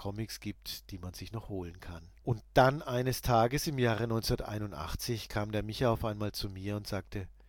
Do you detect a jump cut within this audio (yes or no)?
yes